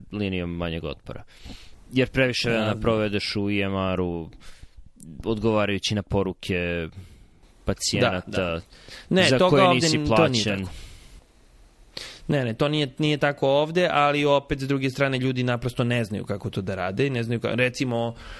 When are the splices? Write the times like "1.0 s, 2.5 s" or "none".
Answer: none